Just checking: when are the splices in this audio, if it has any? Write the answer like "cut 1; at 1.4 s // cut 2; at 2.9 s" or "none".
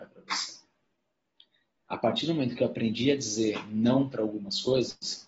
cut 1; at 1.9 s